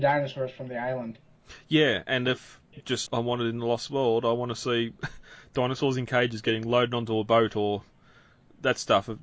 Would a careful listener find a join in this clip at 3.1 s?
yes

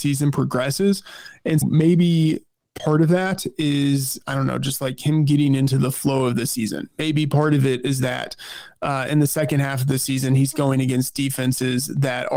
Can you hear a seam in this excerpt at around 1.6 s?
yes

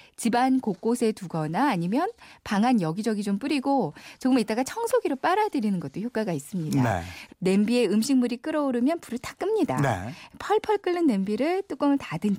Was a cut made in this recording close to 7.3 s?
yes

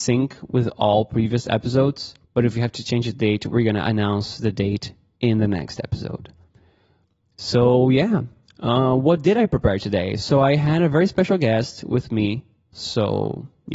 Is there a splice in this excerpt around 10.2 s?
no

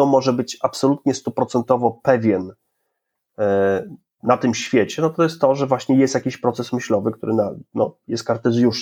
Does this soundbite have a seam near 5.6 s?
no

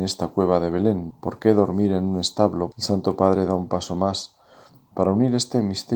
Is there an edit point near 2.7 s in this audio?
yes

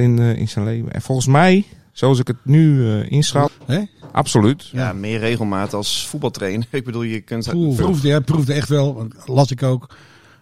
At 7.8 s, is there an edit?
yes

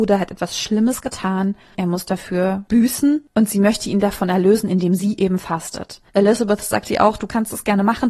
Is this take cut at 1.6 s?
no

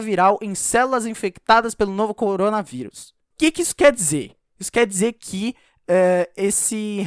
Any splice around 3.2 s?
no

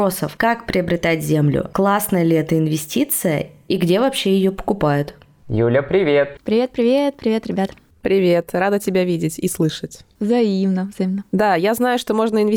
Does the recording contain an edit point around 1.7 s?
yes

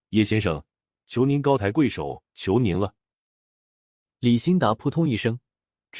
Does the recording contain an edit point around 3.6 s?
no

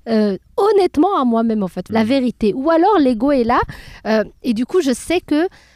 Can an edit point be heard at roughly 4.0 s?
no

